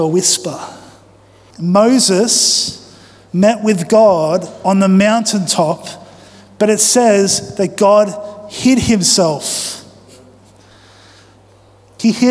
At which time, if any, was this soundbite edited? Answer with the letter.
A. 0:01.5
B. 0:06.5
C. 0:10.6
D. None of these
A